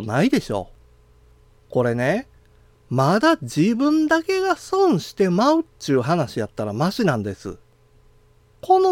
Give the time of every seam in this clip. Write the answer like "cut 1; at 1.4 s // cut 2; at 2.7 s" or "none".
none